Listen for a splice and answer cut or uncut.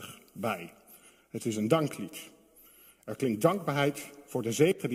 uncut